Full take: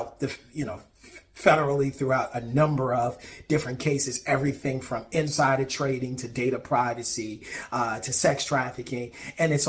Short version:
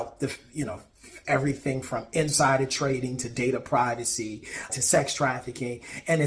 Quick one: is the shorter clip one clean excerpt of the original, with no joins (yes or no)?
no